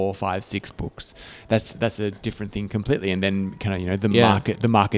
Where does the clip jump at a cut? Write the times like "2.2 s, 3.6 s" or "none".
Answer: none